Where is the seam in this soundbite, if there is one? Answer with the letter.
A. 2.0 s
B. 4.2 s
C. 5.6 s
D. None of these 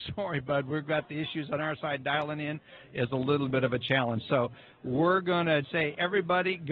C